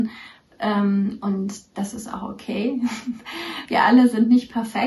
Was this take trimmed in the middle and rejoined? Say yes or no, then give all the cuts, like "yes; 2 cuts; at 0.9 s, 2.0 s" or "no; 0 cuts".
no; 0 cuts